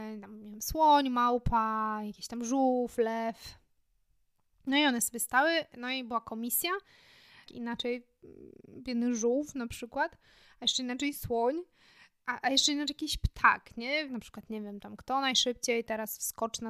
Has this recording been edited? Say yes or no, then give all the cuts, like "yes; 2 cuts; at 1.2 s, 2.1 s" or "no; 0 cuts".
yes; 2 cuts; at 7.5 s, 14.1 s